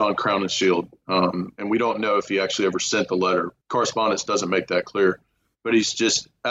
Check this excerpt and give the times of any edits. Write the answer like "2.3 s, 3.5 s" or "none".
3.6 s